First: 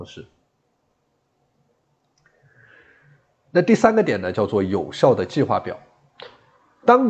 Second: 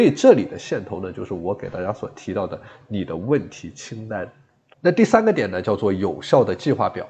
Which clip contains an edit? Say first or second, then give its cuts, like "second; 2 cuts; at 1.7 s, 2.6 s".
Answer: second; 1 cut; at 4.7 s